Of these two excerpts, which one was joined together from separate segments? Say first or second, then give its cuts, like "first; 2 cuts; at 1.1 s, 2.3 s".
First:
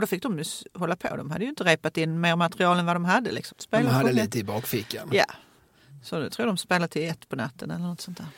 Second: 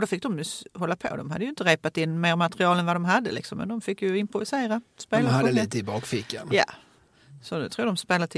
first; 1 cut; at 3.5 s